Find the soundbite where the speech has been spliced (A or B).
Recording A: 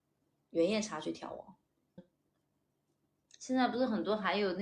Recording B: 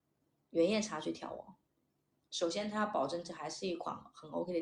A